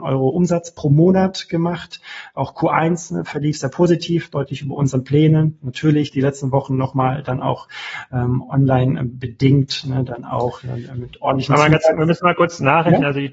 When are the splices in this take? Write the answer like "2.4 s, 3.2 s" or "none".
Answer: none